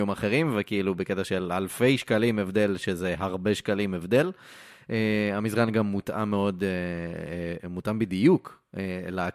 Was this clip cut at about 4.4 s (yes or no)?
no